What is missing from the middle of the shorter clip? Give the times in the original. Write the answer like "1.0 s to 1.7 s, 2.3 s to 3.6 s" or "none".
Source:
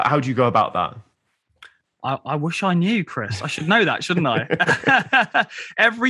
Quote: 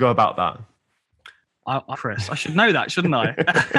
2.3 s to 3.0 s